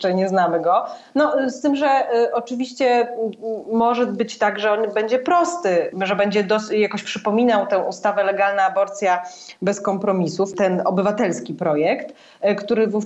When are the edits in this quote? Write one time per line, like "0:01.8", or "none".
none